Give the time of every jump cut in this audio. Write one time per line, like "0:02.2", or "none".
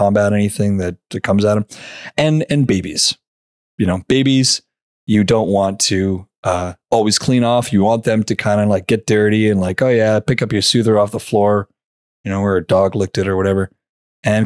none